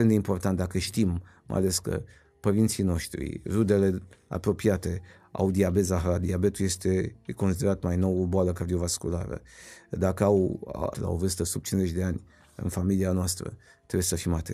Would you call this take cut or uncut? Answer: cut